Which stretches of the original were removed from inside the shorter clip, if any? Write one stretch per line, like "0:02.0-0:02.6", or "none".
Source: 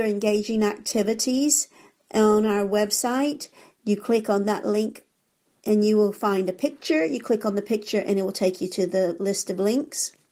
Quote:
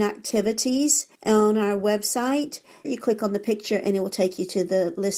0:01.8-0:02.0
0:03.7-0:07.1